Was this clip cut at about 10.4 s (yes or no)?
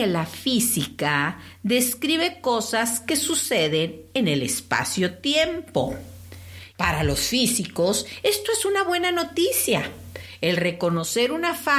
no